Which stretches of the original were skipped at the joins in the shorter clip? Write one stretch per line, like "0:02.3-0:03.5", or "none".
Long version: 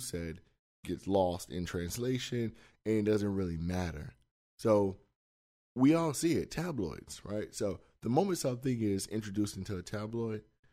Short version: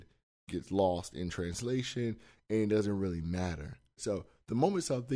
0:04.3-0:07.5